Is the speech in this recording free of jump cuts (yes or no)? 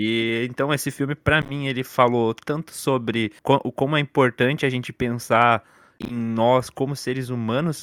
no